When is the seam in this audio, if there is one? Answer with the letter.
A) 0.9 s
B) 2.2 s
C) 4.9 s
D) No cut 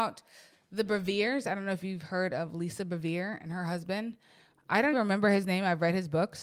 C